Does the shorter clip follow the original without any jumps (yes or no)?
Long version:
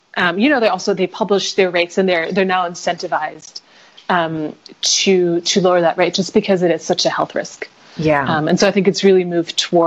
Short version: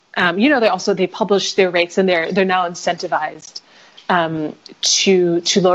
yes